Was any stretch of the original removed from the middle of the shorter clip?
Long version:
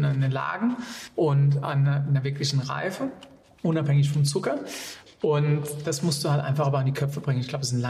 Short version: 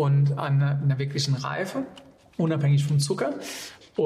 no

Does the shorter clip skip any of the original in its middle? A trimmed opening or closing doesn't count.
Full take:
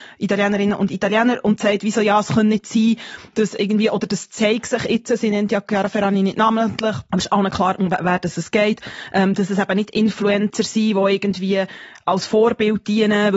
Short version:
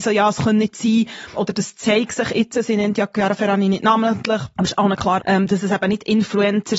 yes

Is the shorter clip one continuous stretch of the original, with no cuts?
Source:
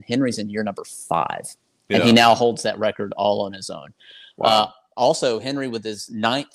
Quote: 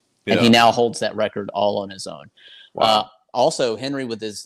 yes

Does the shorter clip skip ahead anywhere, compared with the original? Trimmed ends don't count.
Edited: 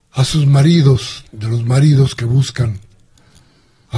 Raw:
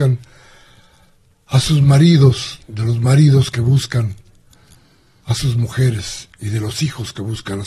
no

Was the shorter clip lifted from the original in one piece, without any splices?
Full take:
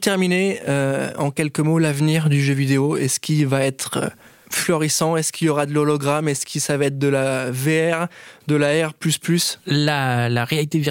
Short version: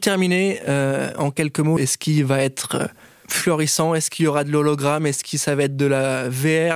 no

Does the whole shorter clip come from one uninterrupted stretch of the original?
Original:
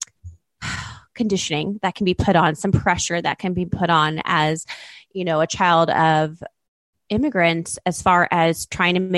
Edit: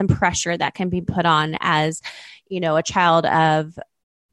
yes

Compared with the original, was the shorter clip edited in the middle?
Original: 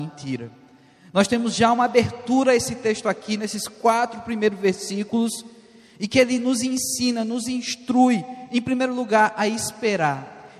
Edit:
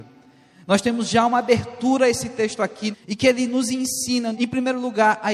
yes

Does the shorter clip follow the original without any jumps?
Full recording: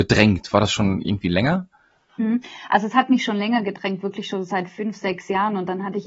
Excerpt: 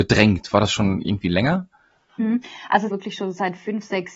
no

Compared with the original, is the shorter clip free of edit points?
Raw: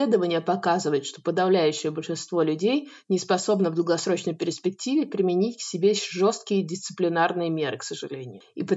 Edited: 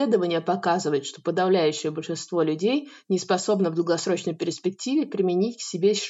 yes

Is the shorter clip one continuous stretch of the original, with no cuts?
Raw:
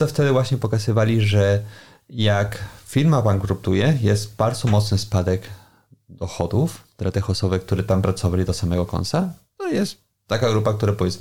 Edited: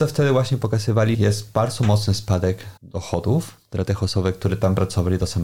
no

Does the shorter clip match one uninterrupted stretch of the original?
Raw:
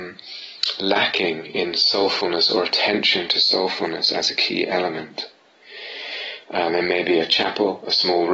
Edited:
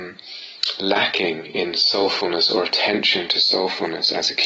yes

